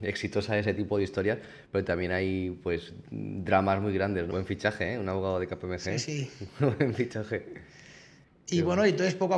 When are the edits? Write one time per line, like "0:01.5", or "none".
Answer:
0:04.3